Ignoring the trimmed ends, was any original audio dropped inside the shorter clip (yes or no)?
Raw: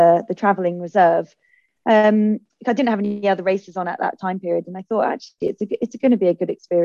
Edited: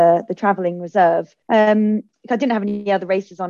yes